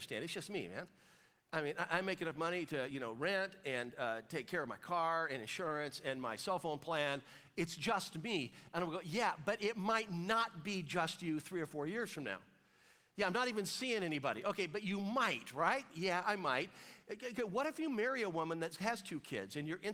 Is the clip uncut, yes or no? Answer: yes